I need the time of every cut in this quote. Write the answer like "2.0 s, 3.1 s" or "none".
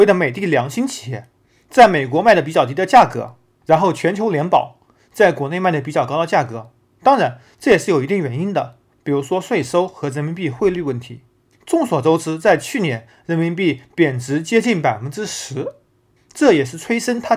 none